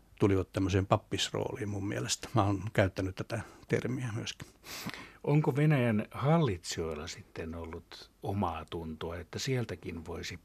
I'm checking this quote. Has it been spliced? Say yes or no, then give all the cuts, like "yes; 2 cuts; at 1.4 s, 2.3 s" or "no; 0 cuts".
yes; 2 cuts; at 8.2 s, 9.2 s